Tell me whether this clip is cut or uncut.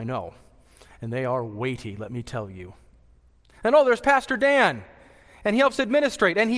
uncut